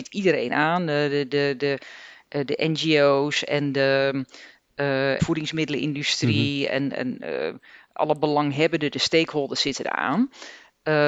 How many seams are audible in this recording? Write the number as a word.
one